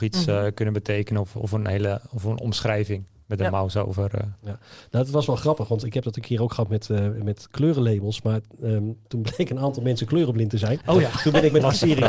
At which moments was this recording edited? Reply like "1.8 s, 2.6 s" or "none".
none